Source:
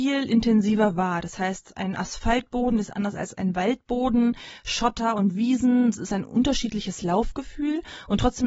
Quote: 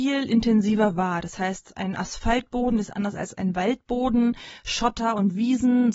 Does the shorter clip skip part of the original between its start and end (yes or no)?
no